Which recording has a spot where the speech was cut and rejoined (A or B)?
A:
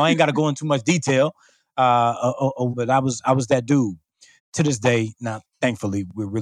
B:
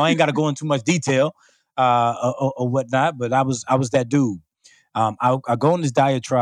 A